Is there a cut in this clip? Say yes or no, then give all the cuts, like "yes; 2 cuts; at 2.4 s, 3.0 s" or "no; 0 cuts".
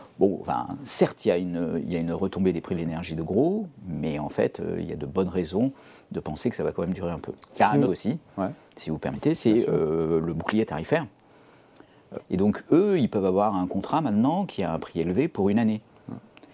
yes; 2 cuts; at 7.9 s, 12.2 s